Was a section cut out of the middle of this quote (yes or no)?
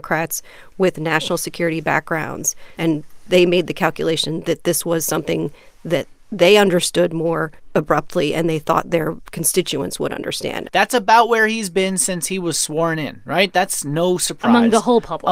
yes